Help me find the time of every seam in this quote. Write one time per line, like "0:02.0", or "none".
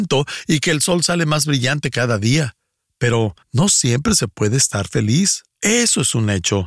0:03.4
0:05.5